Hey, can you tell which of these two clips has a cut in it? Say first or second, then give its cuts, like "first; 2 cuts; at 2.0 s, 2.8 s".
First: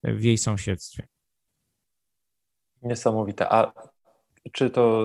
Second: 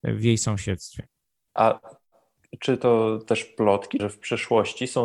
second; 2 cuts; at 1.6 s, 4.0 s